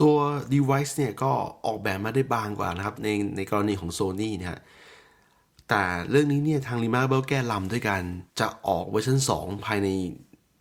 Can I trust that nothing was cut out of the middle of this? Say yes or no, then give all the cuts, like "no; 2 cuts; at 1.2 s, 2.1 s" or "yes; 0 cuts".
no; 1 cut; at 8.3 s